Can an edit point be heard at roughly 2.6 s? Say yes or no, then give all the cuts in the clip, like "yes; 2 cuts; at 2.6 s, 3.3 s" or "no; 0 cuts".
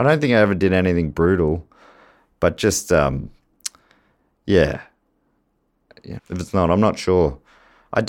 no; 1 cut; at 6.2 s